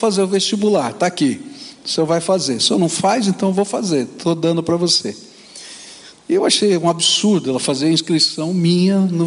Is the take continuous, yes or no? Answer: yes